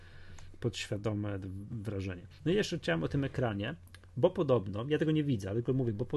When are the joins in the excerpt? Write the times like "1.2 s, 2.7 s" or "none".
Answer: none